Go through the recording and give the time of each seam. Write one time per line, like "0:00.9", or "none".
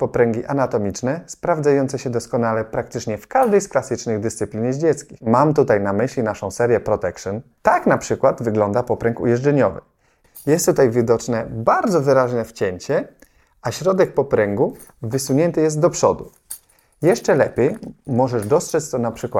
none